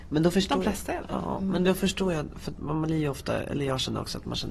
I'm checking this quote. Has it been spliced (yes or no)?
no